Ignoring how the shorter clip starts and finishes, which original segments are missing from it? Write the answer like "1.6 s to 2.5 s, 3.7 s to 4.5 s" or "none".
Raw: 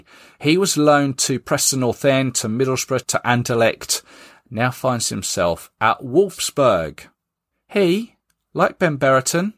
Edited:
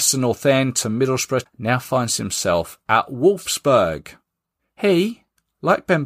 3.0 s to 4.4 s

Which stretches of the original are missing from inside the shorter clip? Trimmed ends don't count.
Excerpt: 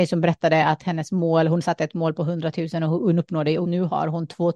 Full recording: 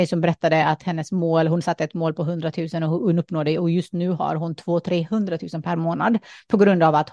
3.6 s to 3.9 s

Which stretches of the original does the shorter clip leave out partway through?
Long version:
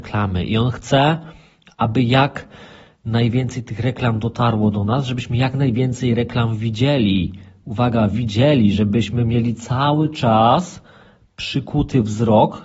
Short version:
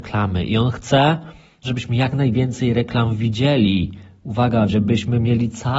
1.6 s to 5.0 s, 8.1 s to 8.7 s

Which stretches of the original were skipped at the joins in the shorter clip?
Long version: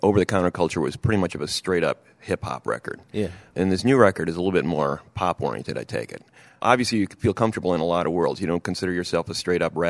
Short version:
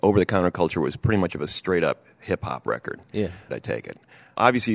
3.5 s to 5.7 s

